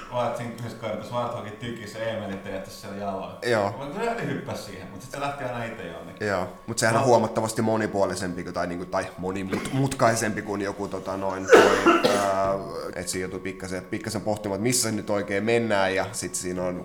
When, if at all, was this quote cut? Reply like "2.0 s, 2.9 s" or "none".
12.9 s